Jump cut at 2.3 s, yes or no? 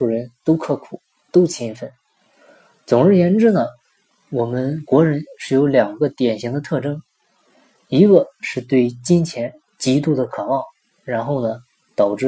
no